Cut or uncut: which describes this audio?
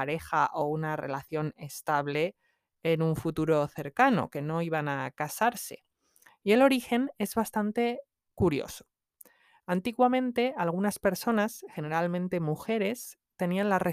uncut